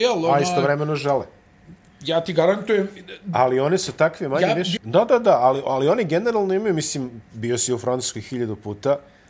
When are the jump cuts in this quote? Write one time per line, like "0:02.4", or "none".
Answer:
0:04.8